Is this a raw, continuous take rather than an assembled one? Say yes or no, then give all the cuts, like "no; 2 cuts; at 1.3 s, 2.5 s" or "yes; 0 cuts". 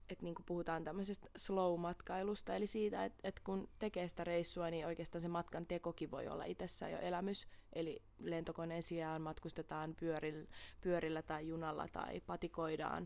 yes; 0 cuts